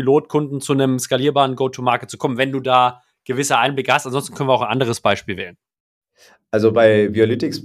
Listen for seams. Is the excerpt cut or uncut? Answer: uncut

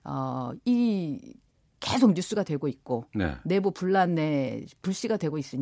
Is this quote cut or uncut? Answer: uncut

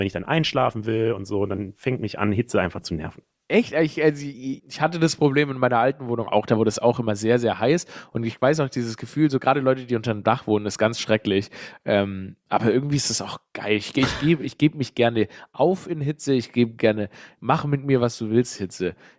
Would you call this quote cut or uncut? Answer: cut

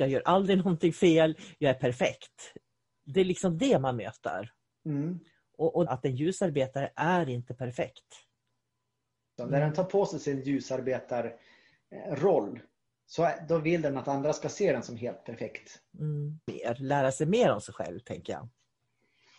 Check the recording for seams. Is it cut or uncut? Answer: cut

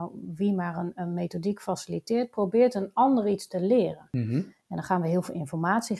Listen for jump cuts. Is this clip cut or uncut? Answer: cut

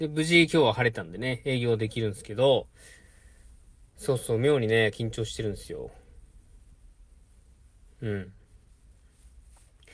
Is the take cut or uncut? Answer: uncut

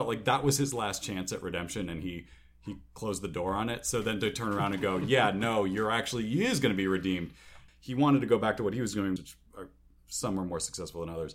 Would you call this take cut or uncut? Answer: cut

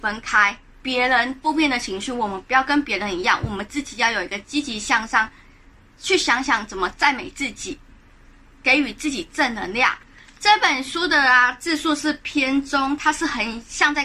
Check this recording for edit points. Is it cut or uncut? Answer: uncut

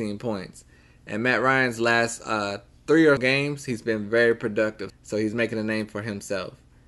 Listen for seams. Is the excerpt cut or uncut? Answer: cut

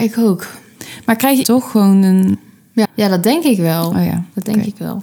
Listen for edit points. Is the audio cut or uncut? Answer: cut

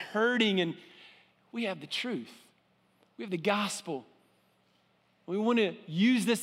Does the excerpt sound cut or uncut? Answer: uncut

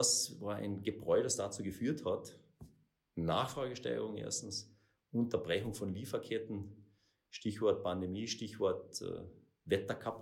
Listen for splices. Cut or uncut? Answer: uncut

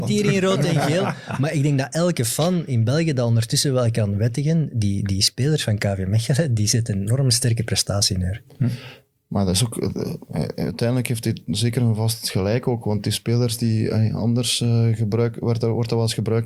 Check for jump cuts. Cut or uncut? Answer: uncut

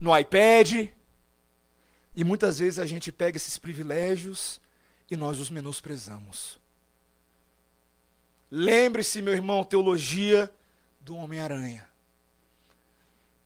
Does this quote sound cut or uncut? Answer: cut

